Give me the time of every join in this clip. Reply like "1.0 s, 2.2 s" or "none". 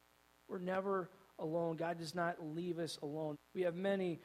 3.3 s